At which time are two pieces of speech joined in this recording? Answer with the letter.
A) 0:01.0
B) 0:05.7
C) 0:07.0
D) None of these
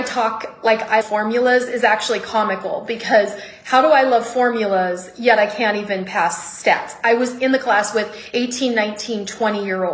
A